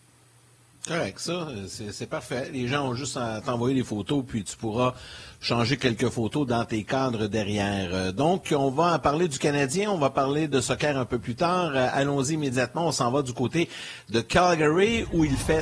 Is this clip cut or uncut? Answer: uncut